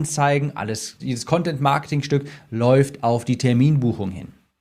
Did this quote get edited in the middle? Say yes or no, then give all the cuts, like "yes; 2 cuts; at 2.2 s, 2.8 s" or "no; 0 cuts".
yes; 1 cut; at 1.0 s